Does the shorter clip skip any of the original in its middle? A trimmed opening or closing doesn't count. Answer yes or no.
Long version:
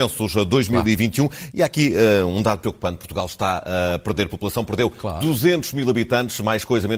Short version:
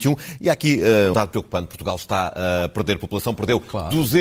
yes